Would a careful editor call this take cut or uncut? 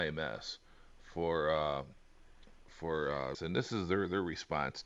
cut